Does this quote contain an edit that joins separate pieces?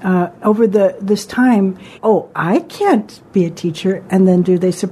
yes; 1 cut; at 2.0 s

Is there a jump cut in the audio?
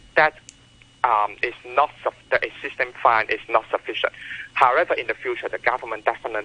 no; 0 cuts

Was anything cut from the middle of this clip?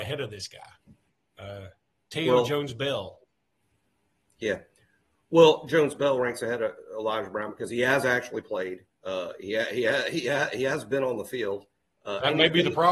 no; 0 cuts

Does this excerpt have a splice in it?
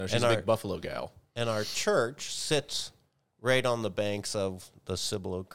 no; 0 cuts

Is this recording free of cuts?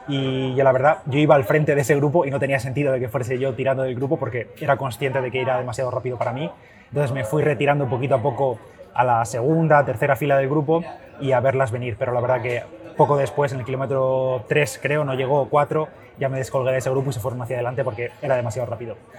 yes; 0 cuts

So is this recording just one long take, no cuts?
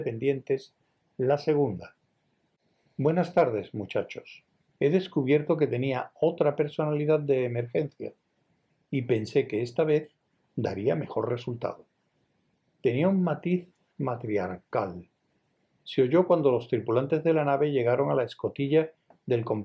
no; 2 cuts; at 4.8 s, 12.7 s

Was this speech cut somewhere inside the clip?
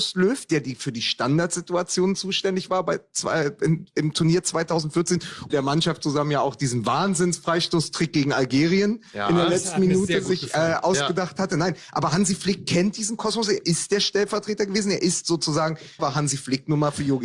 yes; 2 cuts; at 5.5 s, 16.0 s

